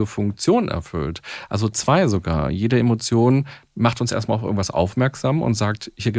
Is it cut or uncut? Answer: uncut